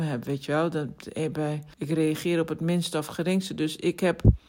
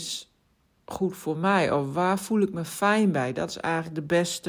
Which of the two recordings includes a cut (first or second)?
first